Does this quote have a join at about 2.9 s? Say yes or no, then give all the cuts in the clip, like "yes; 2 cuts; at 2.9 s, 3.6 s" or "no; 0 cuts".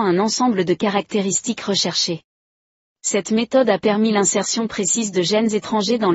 yes; 1 cut; at 2.9 s